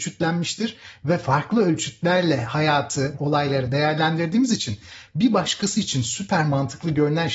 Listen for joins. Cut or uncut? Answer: cut